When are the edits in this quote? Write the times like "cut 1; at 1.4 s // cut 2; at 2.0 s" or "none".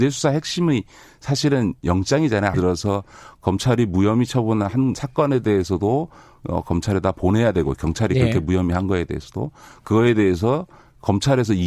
cut 1; at 2.5 s